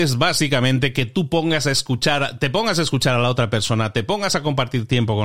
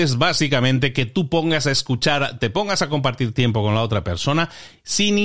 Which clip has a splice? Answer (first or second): second